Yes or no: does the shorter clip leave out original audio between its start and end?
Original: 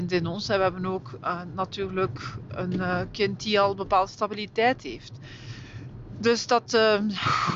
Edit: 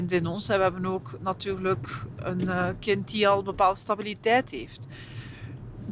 yes